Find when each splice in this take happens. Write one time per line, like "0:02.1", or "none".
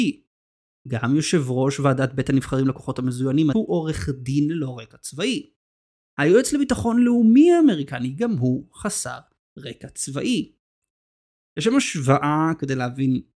0:03.5
0:11.5